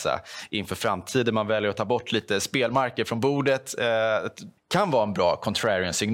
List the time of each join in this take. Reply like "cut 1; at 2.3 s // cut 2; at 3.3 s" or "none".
cut 1; at 4.6 s

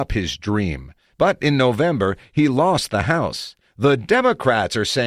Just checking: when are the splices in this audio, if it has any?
cut 1; at 3.6 s

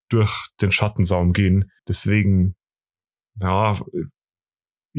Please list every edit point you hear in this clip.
cut 1; at 1.8 s

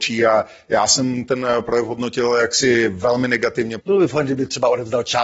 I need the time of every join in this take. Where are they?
cut 1; at 3.8 s

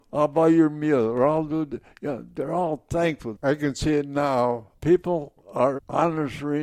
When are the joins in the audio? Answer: cut 1; at 3.4 s

